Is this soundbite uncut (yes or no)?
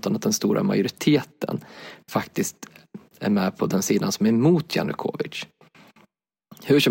yes